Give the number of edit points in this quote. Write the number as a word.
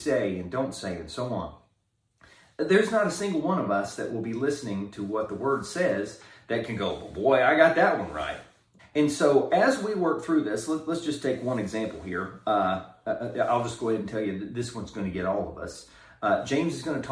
one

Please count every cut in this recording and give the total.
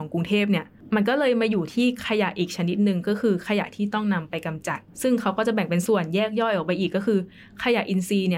one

